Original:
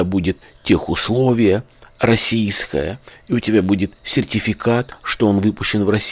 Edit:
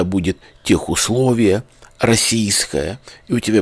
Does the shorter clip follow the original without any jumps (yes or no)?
yes